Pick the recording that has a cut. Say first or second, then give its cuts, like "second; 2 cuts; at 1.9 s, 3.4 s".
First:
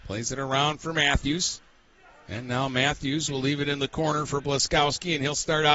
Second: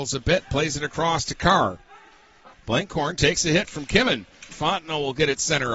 second; 2 cuts; at 2.5 s, 4.5 s